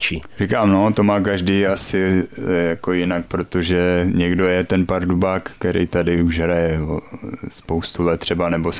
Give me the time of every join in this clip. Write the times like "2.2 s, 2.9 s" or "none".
none